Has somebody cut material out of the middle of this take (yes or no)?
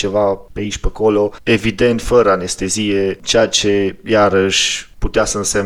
no